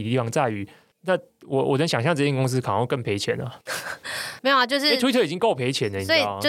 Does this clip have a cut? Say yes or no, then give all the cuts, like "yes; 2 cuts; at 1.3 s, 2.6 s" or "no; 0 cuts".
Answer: no; 0 cuts